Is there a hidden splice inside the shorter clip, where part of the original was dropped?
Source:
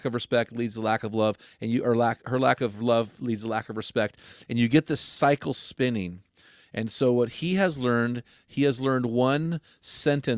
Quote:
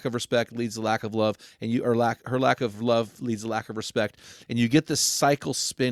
no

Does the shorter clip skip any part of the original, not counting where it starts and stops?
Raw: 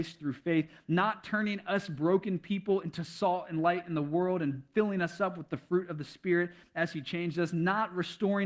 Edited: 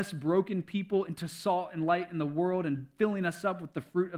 no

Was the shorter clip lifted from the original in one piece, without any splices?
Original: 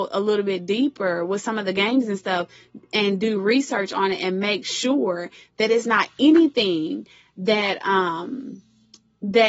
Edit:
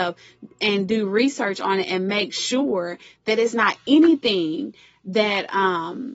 yes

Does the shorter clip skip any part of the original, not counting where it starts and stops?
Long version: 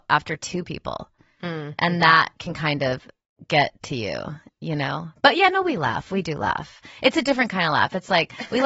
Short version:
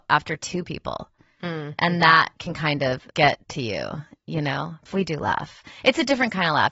yes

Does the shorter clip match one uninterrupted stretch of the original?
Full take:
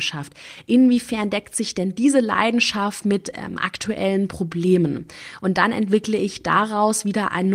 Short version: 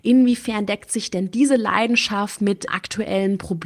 no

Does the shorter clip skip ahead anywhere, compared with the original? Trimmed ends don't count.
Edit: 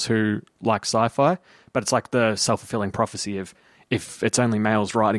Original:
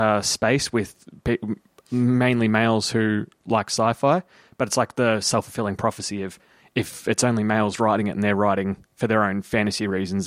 no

